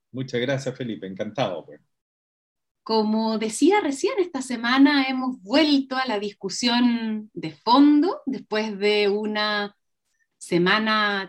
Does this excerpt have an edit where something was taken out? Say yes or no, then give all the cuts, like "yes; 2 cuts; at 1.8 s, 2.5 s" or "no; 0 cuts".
yes; 1 cut; at 2.7 s